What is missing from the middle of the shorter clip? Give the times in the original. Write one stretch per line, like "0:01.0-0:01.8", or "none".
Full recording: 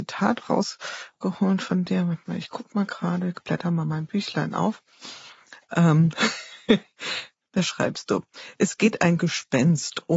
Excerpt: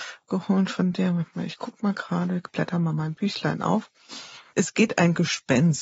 0:05.4-0:08.6

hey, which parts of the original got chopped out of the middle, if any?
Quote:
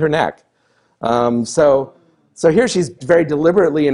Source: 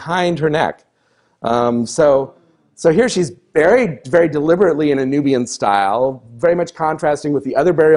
0:03.4-0:04.0

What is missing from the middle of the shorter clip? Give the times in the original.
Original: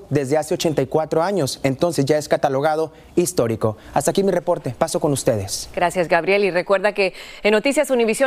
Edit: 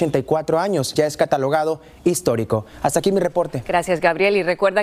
0:01.6-0:02.1
0:04.8-0:05.7

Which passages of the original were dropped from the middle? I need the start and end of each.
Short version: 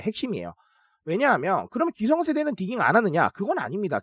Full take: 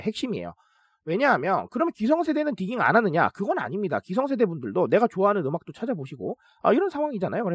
none

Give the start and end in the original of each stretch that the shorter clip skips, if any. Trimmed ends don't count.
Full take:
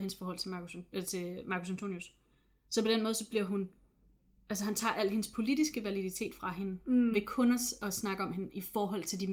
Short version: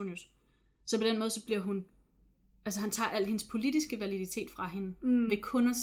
none

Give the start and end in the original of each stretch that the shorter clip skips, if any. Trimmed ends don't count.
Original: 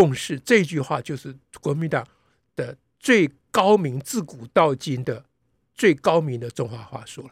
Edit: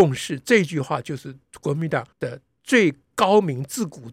0:02.1-0:02.5

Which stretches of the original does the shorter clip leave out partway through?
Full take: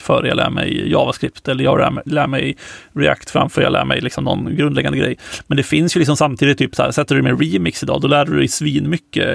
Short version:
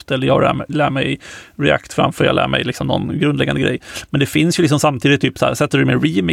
none

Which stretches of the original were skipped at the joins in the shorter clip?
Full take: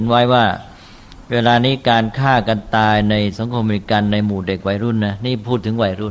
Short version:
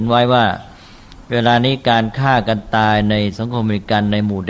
none

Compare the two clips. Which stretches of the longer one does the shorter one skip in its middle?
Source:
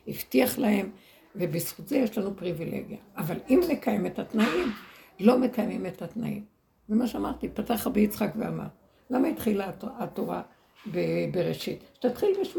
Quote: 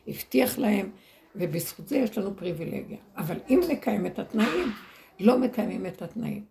none

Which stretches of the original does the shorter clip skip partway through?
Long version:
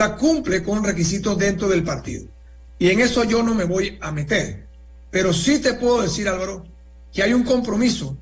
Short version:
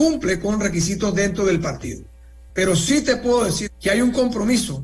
0:02.7-0:05.1
0:06.2-0:07.0

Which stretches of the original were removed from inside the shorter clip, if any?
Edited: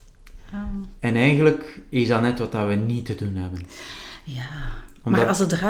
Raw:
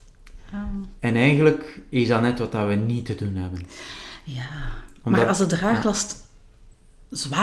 none

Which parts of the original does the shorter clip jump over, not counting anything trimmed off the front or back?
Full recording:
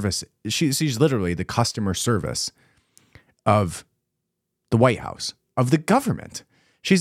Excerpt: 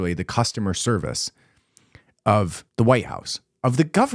0:03.9-0:04.6

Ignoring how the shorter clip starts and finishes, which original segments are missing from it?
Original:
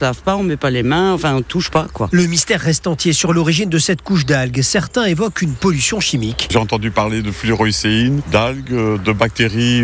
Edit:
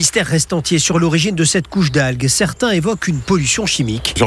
none

